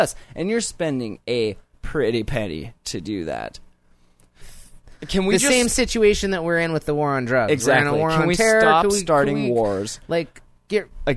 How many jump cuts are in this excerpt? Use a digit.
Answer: 1